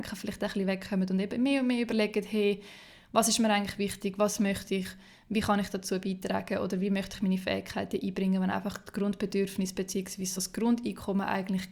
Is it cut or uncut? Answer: uncut